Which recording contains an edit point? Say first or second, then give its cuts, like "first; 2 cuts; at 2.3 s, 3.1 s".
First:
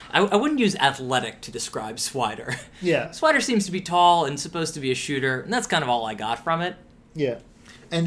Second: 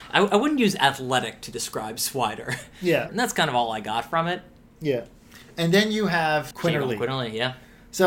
second; 2 cuts; at 3.1 s, 6.5 s